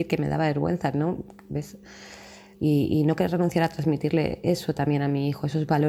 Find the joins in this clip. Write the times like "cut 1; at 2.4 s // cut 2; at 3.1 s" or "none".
cut 1; at 2.5 s